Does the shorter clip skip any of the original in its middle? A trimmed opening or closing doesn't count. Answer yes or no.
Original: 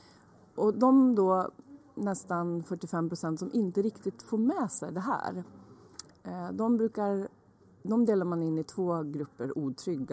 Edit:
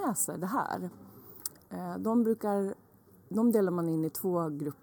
no